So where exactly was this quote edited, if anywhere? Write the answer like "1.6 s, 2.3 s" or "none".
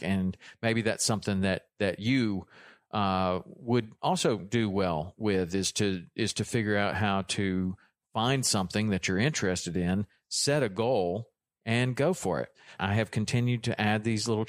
12.8 s